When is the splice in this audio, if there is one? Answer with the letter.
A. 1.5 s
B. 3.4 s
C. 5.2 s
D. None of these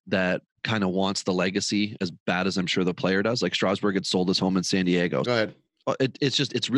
C